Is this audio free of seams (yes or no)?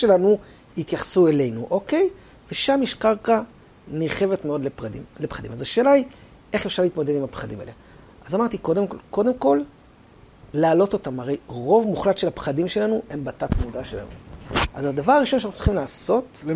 yes